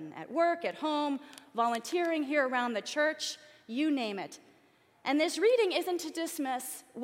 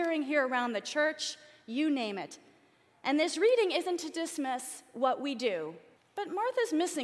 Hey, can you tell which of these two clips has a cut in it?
second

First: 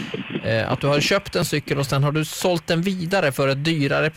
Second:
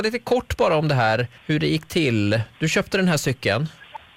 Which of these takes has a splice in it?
second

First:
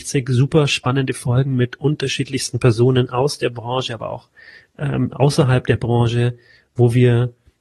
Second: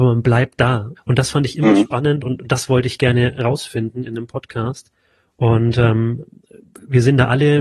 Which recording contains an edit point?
second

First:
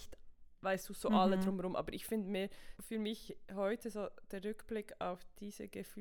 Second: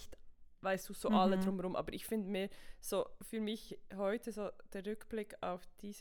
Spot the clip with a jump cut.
first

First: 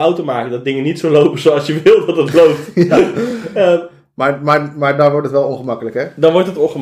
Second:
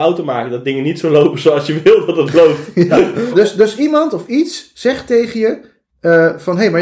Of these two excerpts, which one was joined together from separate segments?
second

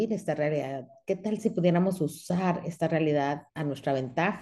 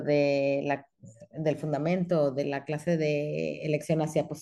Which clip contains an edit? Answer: first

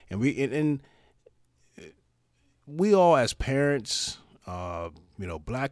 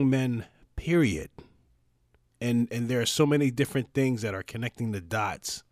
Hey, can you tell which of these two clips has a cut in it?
second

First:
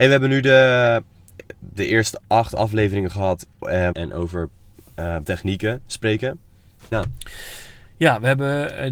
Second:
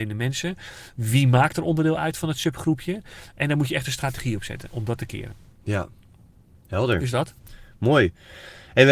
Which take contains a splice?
first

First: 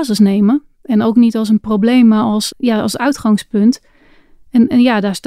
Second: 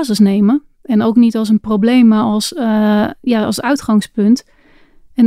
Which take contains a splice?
first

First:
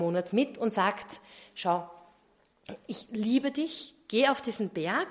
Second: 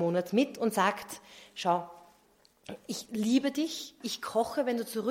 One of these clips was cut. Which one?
second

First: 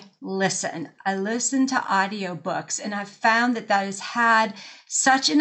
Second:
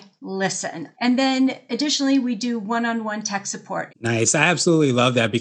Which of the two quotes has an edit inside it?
second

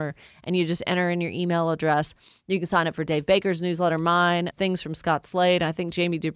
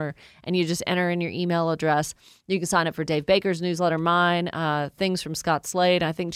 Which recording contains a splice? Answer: first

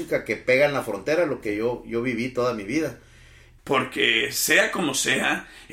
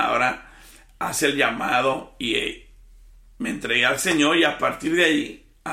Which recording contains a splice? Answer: first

